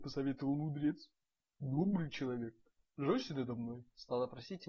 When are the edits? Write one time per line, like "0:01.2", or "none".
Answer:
0:01.5